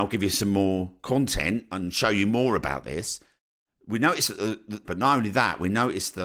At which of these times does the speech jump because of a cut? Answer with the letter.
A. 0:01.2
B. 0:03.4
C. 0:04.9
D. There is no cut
C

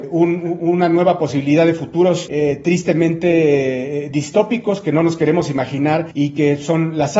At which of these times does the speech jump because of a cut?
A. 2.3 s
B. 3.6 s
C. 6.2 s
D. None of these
D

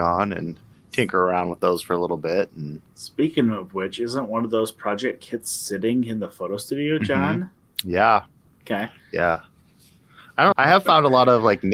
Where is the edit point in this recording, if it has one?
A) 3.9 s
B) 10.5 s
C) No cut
B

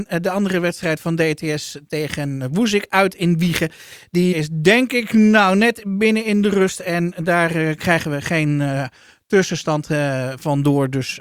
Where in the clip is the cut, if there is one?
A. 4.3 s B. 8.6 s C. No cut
A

